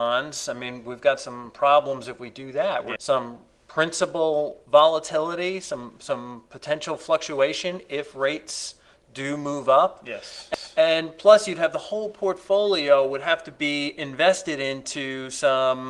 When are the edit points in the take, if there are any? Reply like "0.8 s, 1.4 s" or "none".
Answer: 3.0 s